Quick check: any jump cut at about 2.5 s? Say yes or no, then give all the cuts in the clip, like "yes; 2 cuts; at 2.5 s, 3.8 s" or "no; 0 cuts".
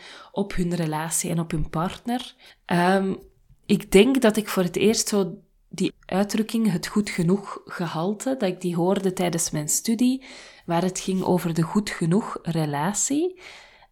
yes; 2 cuts; at 2.5 s, 5.9 s